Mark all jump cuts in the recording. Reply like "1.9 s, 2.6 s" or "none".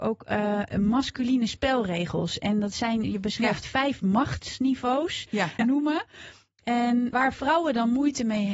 3.0 s, 5.6 s, 7.1 s